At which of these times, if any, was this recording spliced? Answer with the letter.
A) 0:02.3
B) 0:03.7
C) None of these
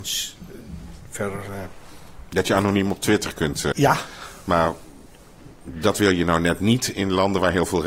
B